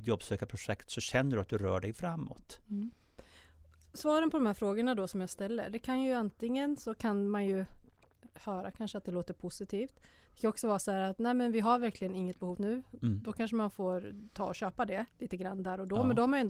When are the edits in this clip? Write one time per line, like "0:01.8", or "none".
0:12.5